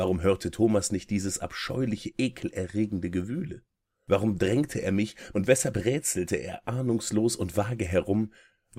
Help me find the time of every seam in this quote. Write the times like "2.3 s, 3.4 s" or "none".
5.3 s